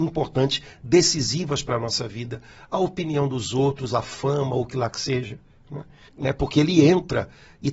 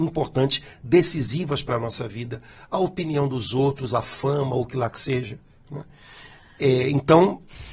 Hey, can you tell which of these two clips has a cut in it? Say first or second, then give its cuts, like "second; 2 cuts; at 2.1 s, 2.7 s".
first; 1 cut; at 6.1 s